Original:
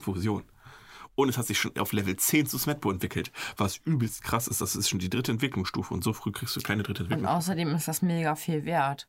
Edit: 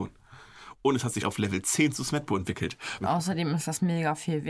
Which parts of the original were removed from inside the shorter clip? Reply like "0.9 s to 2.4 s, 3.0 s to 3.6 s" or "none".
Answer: 1.5 s to 1.7 s, 3.5 s to 7.2 s